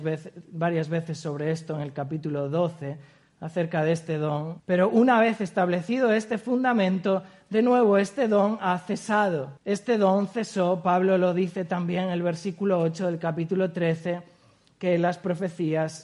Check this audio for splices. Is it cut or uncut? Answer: cut